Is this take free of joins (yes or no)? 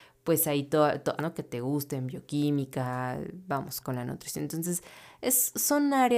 no